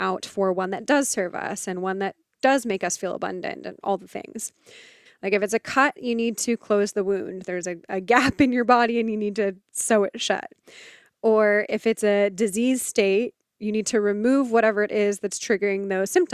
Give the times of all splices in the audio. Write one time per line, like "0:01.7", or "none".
0:05.1